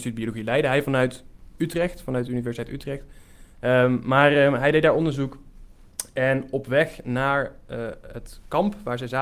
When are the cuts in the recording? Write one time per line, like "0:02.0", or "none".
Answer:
0:03.5